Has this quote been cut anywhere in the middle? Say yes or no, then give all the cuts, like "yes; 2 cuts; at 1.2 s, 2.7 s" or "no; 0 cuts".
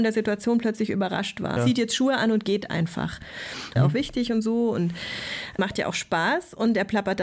yes; 2 cuts; at 1.6 s, 3.8 s